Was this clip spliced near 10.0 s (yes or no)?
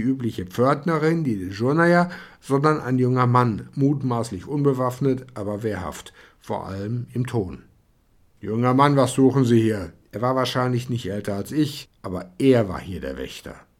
yes